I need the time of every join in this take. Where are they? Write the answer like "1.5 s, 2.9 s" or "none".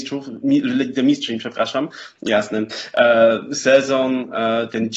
2.2 s

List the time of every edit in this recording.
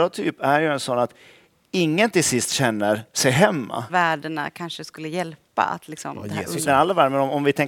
3.9 s, 6.6 s

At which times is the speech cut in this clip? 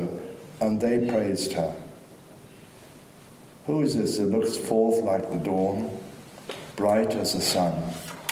6.7 s

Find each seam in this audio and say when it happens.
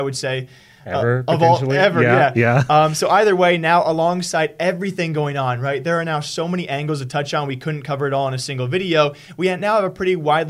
none

